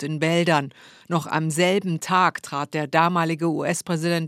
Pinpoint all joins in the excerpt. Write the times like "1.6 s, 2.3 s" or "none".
none